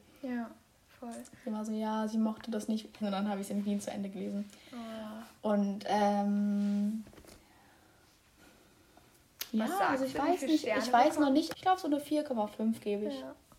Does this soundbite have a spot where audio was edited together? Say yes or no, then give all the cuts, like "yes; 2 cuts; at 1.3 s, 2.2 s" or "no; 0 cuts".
yes; 2 cuts; at 3.0 s, 11.5 s